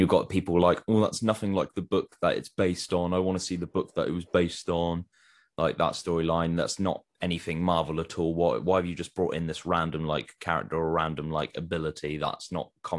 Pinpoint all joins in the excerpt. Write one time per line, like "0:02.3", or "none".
none